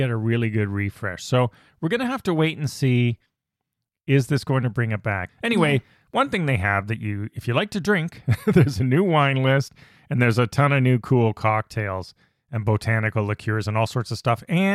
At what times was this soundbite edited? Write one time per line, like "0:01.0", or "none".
0:05.3